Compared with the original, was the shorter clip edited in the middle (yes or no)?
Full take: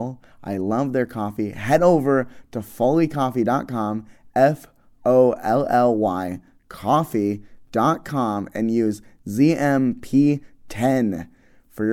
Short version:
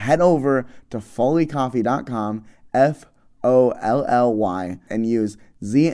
yes